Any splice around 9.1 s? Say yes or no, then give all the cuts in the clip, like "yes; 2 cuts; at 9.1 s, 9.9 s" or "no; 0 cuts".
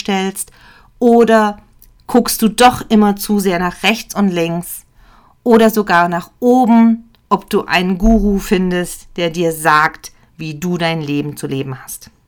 no; 0 cuts